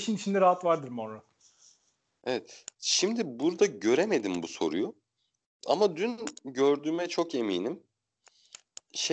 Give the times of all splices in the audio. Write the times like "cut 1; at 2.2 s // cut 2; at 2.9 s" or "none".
none

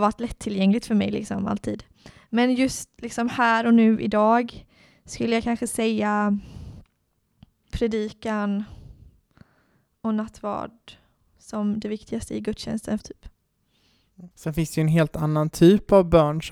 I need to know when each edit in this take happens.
cut 1; at 7.7 s // cut 2; at 13.0 s // cut 3; at 14.3 s

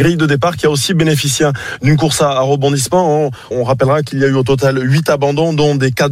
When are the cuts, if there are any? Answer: cut 1; at 3.5 s

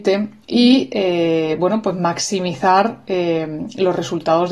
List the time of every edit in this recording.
none

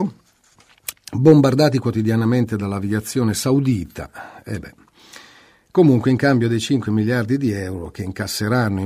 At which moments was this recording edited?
cut 1; at 0.9 s

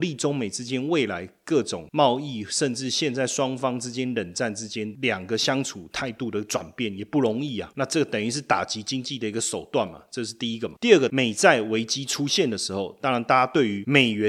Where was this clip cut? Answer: cut 1; at 7.7 s

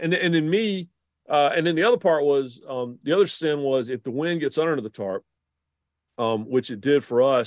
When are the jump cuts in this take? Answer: none

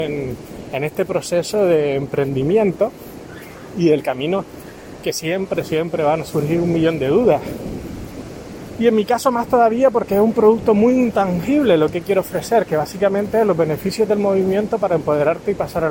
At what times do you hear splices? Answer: none

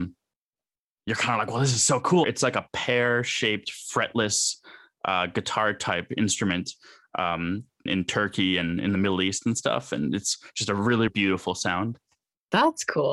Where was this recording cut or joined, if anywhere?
cut 1; at 2.2 s // cut 2; at 7.9 s // cut 3; at 11.1 s

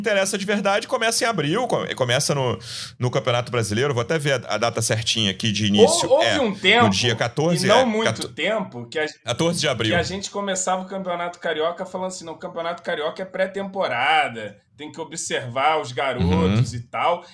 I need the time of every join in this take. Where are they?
none

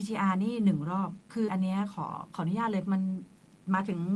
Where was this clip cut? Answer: cut 1; at 1.5 s

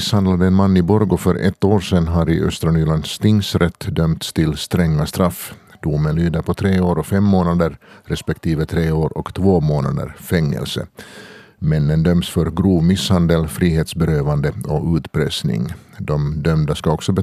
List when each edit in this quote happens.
none

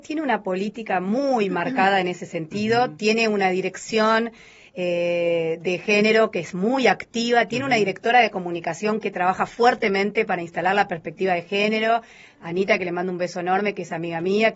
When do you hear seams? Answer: none

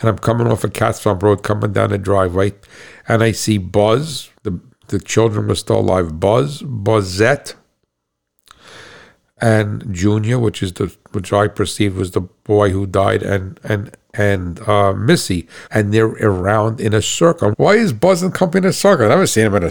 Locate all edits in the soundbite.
cut 1; at 4.4 s // cut 2; at 15.7 s // cut 3; at 17.5 s

